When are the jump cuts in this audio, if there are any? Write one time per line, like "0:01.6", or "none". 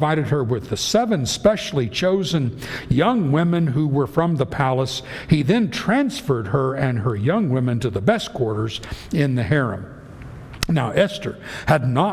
none